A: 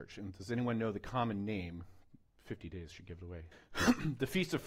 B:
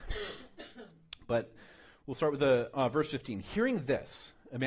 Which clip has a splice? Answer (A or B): A